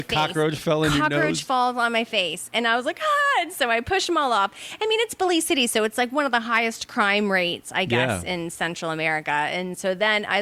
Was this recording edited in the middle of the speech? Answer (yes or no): no